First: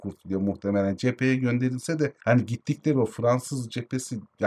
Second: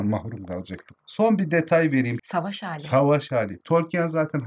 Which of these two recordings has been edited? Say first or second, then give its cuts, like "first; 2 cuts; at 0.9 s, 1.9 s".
second; 1 cut; at 2.2 s